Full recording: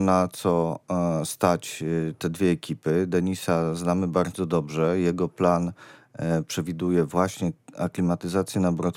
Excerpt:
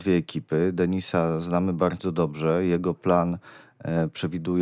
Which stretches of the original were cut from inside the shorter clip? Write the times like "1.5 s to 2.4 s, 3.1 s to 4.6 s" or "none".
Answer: none